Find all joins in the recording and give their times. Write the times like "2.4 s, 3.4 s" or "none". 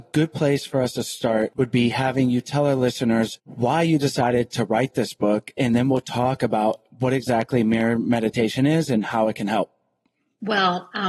none

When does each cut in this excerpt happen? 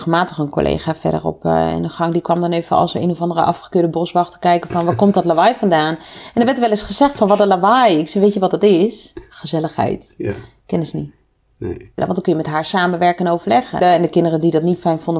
12.0 s, 13.8 s

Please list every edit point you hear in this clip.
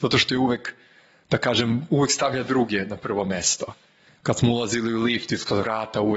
none

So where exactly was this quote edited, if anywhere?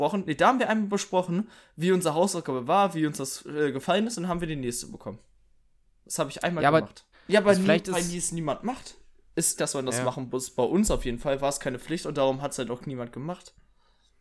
7.1 s, 9.6 s

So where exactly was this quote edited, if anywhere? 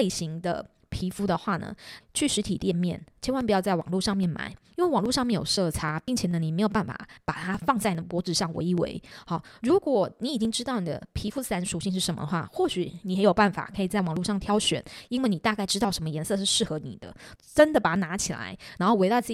2.0 s, 17.4 s

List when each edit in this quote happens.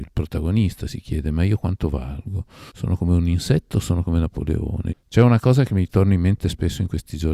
2.7 s, 4.9 s

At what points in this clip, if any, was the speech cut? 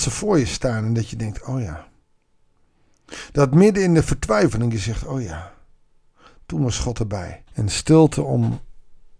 7.5 s

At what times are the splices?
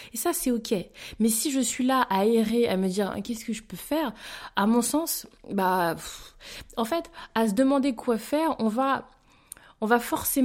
none

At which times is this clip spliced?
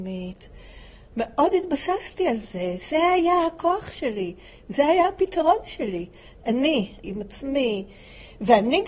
1.1 s, 7.0 s

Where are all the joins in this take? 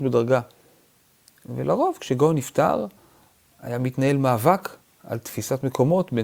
none

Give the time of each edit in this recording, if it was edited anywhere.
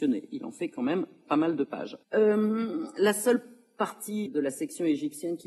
2.0 s, 4.3 s

